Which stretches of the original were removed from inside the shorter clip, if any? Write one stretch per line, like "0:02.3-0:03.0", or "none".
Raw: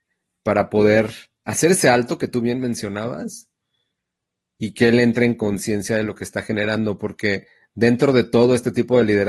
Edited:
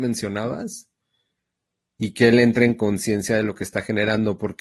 none